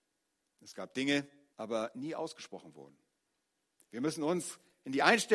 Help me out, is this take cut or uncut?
cut